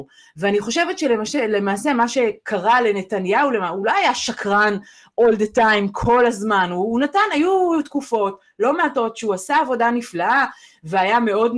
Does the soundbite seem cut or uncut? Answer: uncut